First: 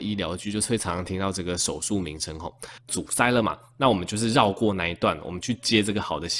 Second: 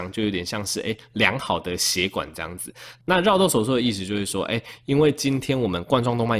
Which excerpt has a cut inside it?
first; 2 cuts; at 2.9 s, 5.2 s

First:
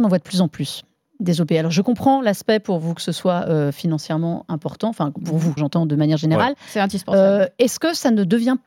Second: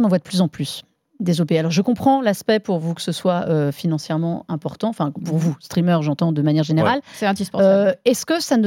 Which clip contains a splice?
first; 1 cut; at 5.6 s

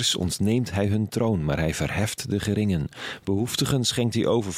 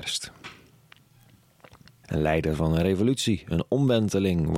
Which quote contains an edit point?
second; 1 cut; at 2.0 s

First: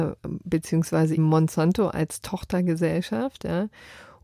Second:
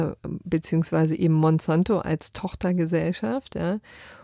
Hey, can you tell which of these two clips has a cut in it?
first; 1 cut; at 1.2 s

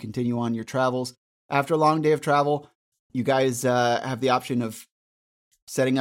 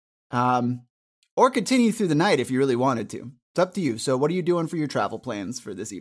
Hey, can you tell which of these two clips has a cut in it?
first; 1 cut; at 2.9 s

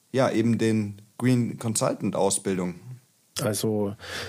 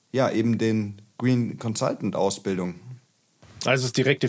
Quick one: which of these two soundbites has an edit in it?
first; 1 cut; at 3.4 s

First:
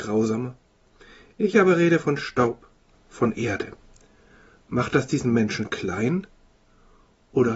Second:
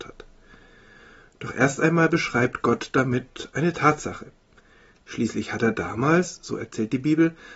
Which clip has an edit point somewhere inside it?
first; 1 cut; at 2.9 s

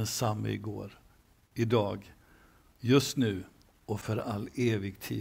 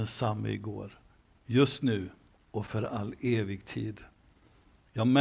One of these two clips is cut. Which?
second; 1 cut; at 1.4 s

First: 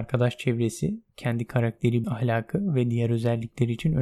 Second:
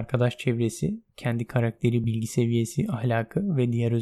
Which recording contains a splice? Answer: first; 1 cut; at 2.0 s

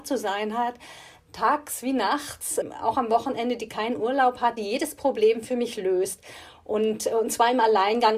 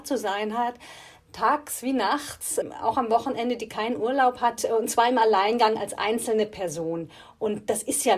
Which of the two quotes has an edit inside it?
second; 1 cut; at 4.6 s

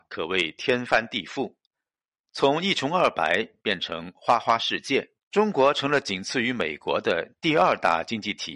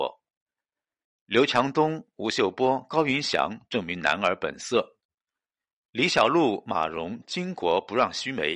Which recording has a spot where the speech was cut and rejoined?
first; 1 cut; at 5.2 s

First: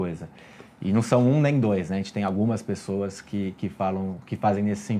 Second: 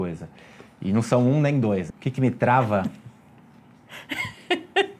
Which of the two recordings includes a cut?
second; 1 cut; at 1.9 s

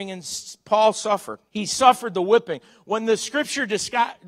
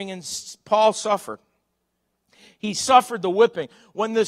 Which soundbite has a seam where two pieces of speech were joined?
first; 1 cut; at 1.5 s

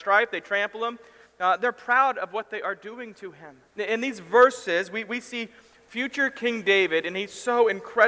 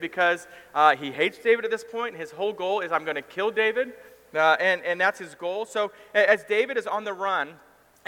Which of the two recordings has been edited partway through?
first; 1 cut; at 3.7 s

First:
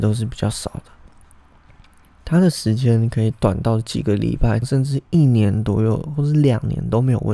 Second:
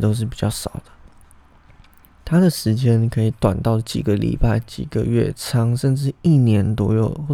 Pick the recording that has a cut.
first; 1 cut; at 4.6 s

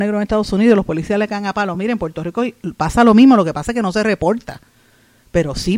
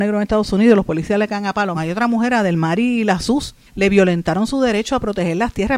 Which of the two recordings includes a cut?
second; 2 cuts; at 1.7 s, 3.7 s

